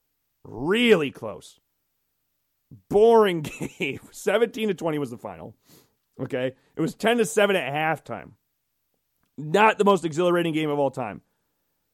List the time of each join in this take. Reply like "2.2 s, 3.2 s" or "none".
none